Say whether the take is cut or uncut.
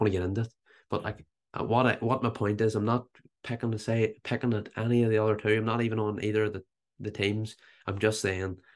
uncut